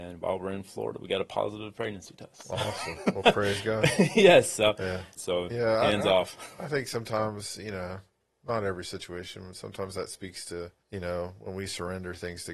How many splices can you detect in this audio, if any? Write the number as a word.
two